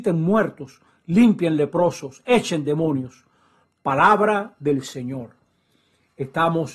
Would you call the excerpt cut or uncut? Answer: cut